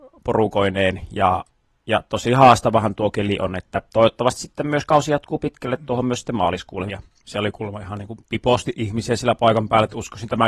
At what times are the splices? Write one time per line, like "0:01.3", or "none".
0:06.9